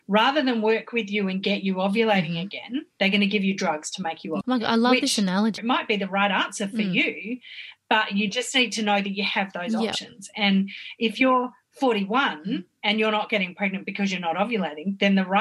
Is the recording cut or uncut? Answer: cut